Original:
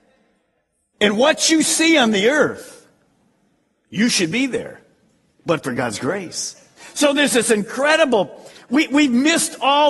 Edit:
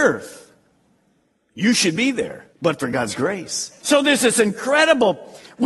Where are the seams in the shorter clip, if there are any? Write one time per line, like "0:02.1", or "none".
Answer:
0:02.5
0:03.8